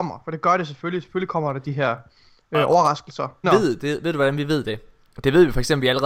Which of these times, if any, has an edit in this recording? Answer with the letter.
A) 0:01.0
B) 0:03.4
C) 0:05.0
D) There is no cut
B